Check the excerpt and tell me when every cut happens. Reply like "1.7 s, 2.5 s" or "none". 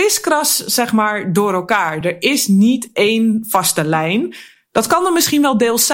none